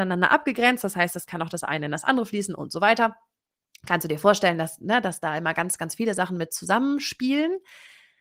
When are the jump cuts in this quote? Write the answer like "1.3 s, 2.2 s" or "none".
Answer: none

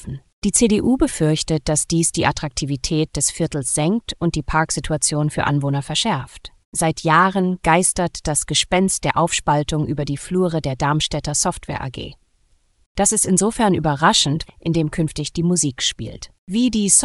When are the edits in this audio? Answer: 6.6 s, 12.8 s, 14.5 s

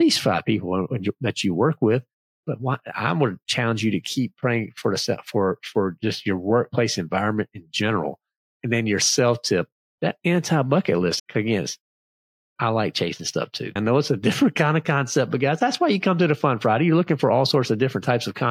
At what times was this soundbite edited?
11.2 s, 13.8 s

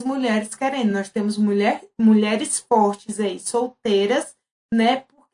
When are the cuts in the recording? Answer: none

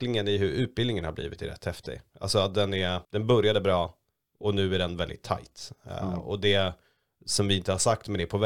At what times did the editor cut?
3.0 s

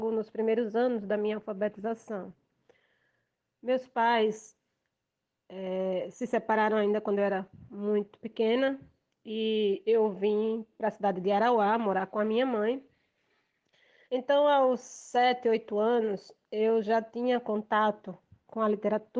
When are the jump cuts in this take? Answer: 14.1 s

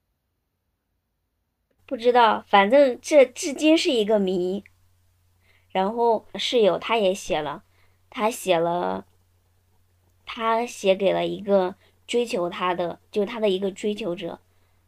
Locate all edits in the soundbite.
6.3 s

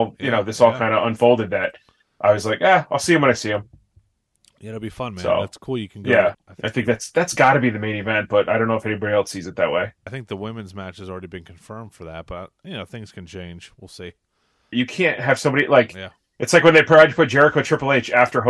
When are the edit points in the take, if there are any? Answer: 6.3 s, 10.1 s, 14.7 s

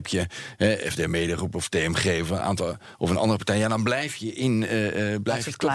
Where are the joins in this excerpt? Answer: none

